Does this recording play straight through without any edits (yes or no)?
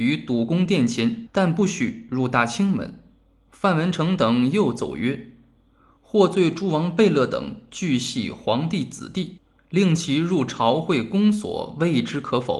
no